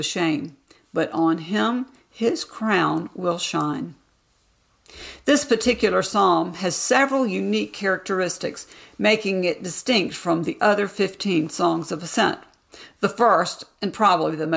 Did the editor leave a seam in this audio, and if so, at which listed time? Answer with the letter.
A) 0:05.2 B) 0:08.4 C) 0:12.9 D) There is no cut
D